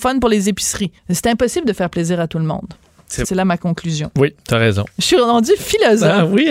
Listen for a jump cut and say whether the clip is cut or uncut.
cut